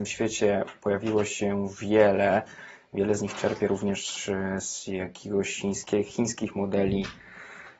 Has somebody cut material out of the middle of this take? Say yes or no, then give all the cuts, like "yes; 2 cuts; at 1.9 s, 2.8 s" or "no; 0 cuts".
no; 0 cuts